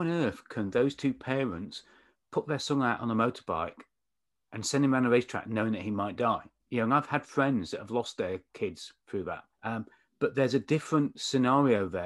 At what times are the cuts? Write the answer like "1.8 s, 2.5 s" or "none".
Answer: 9.5 s

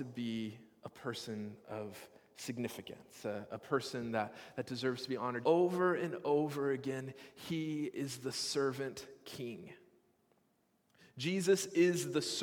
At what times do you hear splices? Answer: 5.4 s

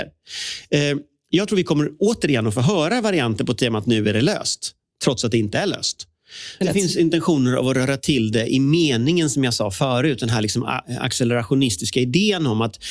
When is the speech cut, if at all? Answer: 6.6 s

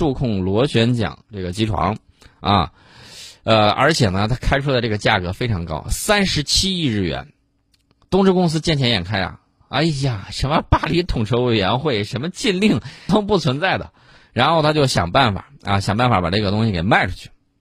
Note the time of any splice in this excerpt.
13.1 s

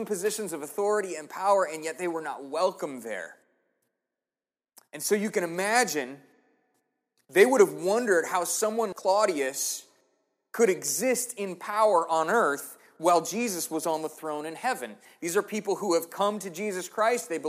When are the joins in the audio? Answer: 8.9 s

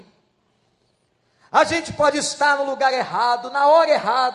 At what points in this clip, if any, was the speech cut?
none

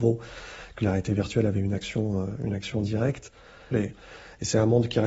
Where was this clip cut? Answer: 3.7 s

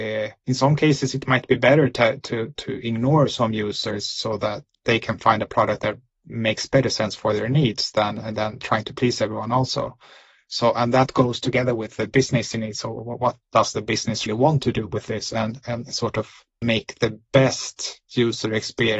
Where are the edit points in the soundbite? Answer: 14.3 s, 16.6 s

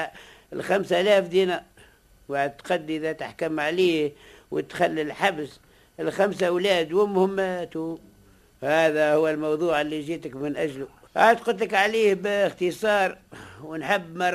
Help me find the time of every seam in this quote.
11.1 s

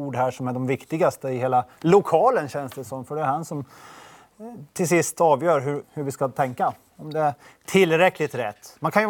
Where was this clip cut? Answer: 5.8 s

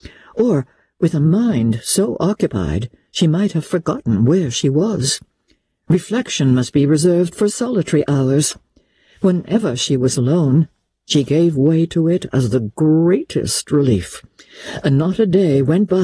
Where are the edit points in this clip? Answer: none

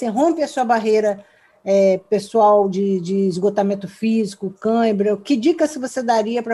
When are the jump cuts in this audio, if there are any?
none

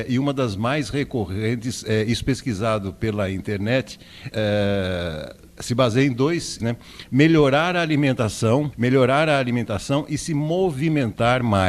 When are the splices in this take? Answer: 4.3 s, 6.6 s, 8.7 s

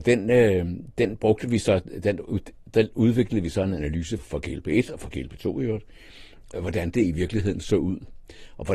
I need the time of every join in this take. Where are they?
4.2 s, 6.5 s

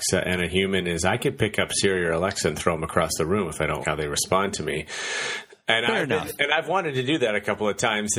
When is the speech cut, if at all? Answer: 3.8 s

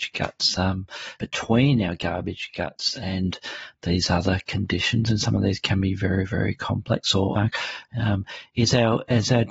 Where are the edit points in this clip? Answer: 1.2 s, 7.3 s

